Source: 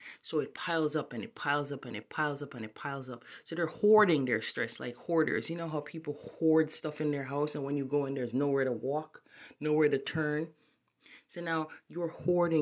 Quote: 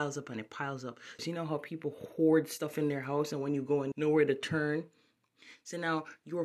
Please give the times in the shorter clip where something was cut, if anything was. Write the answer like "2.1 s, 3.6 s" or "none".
1.2 s, 3.9 s